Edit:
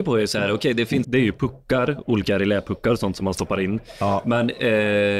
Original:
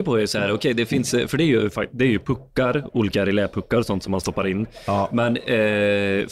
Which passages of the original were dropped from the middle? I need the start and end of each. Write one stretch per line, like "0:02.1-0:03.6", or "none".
0:01.0-0:01.9